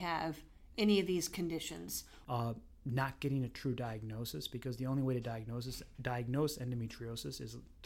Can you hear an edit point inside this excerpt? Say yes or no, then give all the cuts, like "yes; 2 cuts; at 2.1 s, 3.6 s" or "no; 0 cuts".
yes; 1 cut; at 2.2 s